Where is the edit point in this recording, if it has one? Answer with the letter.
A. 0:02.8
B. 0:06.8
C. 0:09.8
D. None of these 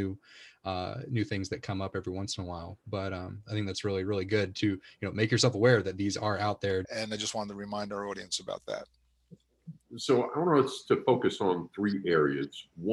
B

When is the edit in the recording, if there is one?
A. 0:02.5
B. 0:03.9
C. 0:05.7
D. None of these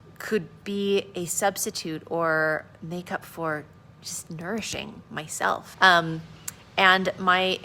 C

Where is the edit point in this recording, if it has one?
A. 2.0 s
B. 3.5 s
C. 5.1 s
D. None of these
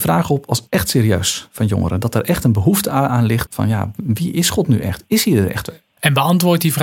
B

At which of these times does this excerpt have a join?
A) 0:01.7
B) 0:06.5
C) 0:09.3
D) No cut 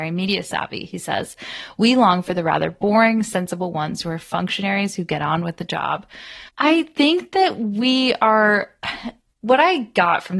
B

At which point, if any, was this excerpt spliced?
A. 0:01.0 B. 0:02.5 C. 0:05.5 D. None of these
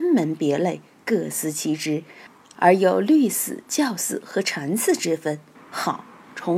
C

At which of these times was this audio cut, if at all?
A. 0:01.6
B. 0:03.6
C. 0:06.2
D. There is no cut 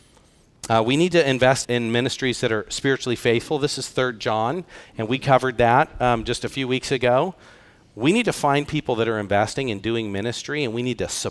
A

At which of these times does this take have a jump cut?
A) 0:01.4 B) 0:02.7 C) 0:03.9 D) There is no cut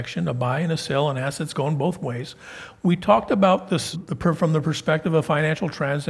C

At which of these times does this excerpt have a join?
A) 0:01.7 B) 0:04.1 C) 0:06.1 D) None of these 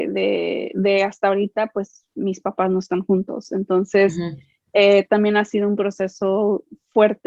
D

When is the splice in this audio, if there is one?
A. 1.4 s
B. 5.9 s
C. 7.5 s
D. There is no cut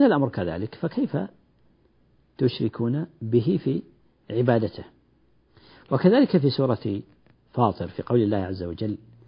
D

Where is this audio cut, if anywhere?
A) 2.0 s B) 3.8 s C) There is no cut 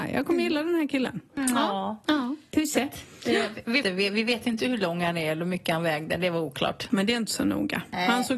B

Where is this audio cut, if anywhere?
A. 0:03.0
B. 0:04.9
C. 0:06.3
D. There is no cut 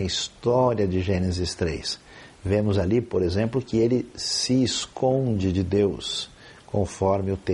D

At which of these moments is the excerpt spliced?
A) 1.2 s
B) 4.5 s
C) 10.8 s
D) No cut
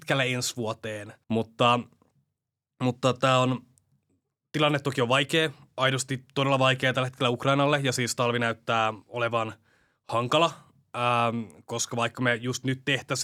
A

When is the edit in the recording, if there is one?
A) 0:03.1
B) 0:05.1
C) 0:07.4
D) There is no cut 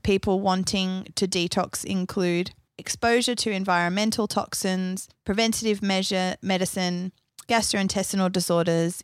C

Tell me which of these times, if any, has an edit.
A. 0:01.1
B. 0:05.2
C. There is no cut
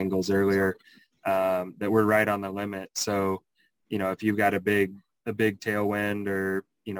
C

